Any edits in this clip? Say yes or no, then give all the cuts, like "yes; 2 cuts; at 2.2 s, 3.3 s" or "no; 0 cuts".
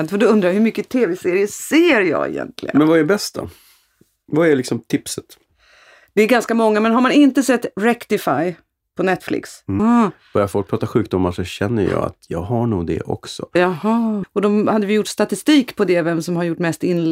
yes; 2 cuts; at 9.8 s, 14.2 s